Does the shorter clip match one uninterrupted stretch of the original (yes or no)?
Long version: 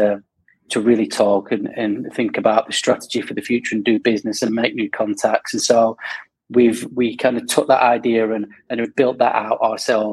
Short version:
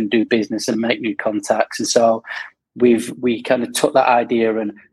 yes